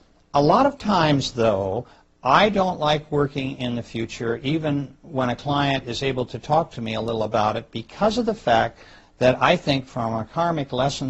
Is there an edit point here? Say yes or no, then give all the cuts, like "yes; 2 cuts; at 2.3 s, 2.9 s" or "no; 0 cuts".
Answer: no; 0 cuts